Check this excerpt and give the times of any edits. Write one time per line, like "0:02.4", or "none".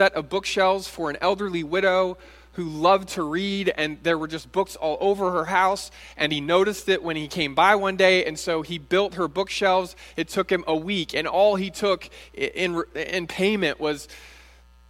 none